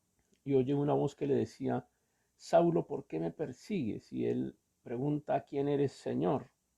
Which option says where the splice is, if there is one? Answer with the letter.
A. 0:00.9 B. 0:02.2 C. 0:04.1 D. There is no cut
D